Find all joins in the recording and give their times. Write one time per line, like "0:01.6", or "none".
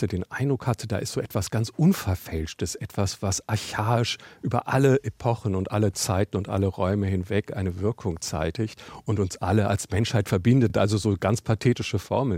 none